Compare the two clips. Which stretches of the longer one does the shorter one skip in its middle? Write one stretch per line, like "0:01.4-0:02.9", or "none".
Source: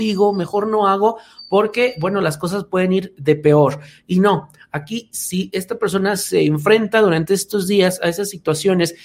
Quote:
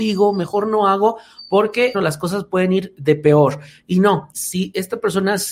0:01.9-0:02.1
0:04.5-0:05.1